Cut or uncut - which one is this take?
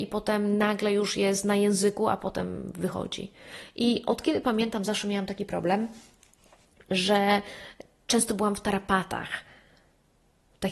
uncut